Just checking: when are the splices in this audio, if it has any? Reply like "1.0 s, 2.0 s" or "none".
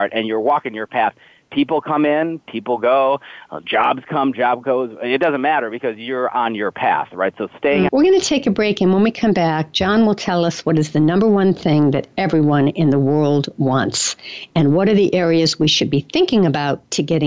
7.9 s